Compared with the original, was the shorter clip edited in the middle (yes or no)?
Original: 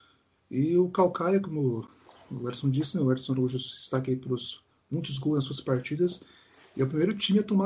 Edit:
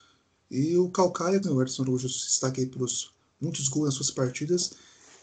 yes